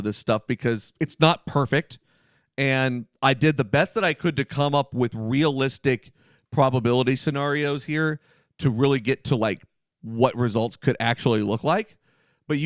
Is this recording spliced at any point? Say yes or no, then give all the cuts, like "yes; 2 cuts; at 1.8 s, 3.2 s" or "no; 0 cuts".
no; 0 cuts